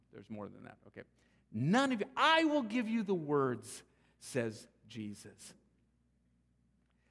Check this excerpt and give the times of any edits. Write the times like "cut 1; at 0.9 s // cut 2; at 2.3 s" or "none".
none